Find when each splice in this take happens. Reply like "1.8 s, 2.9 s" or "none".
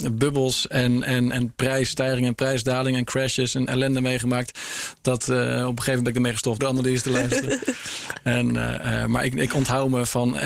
6.6 s